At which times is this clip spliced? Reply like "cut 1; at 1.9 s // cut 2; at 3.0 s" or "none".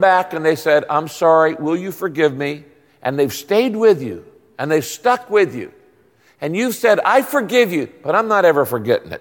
none